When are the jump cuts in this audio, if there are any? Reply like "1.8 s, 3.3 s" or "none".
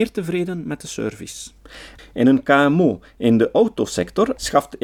2.0 s